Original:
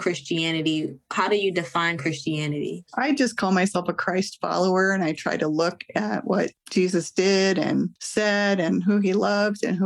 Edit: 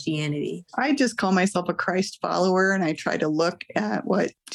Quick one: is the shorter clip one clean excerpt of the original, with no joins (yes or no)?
yes